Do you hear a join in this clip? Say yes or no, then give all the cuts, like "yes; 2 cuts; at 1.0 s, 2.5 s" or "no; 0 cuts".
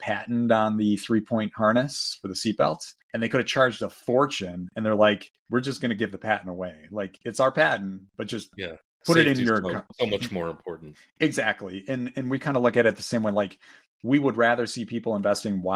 yes; 2 cuts; at 3.0 s, 5.4 s